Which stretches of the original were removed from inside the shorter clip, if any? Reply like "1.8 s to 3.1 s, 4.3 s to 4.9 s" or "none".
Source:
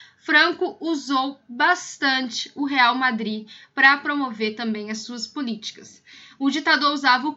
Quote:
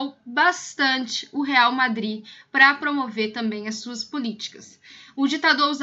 none